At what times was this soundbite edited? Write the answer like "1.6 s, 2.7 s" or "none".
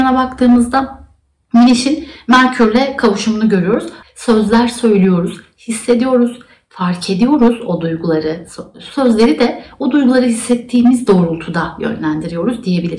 4.0 s

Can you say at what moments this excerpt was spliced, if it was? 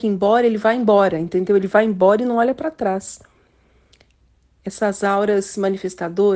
none

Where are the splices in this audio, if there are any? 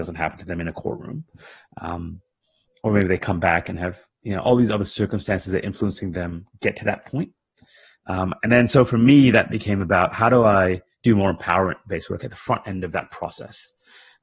none

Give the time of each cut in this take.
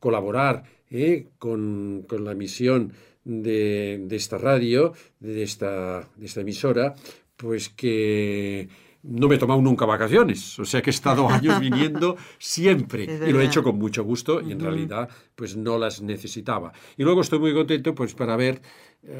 none

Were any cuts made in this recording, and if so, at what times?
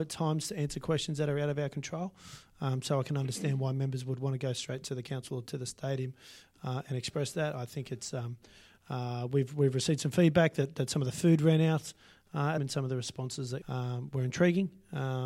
12.6 s, 13.6 s

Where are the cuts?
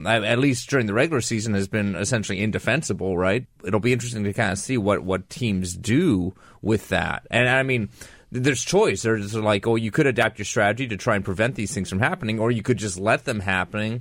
3.4 s

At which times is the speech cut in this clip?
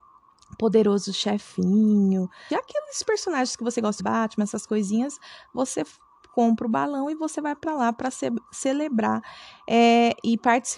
2.5 s, 4.0 s

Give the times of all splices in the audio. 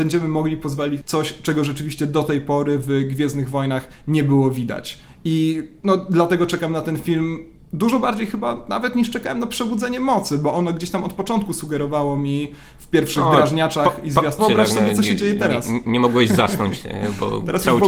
1.0 s, 14.4 s

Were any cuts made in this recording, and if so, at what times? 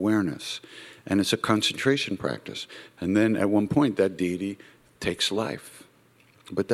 none

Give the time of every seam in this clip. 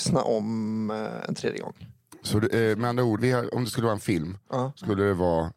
3.2 s

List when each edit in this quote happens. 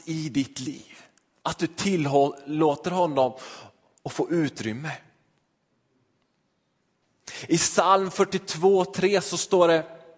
none

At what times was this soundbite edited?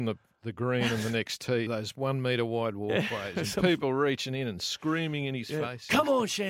1.7 s

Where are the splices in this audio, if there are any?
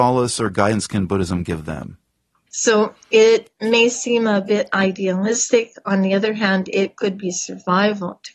2.5 s

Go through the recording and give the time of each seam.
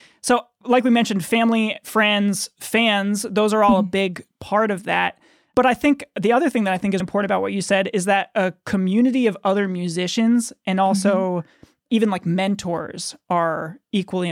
7.0 s

